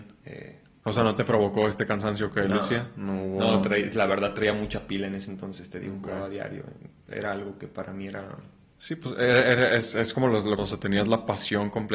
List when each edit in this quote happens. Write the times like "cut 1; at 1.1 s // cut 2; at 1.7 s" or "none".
cut 1; at 10.6 s